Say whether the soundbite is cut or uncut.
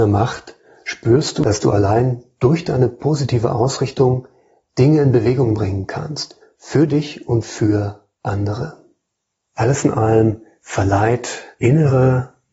uncut